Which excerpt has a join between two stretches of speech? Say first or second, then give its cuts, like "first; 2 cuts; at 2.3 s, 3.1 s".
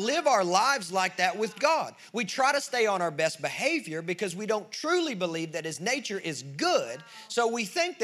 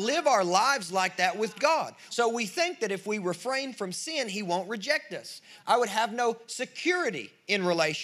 second; 2 cuts; at 2.1 s, 5.6 s